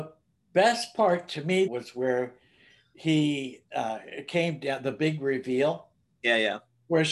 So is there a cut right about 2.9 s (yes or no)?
no